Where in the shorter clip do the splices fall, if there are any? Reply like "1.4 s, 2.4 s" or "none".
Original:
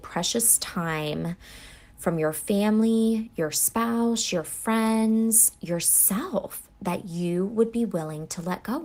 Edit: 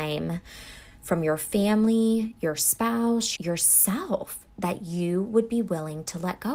3.4 s